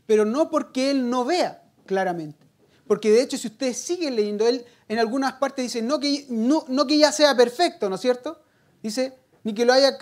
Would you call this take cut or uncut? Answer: uncut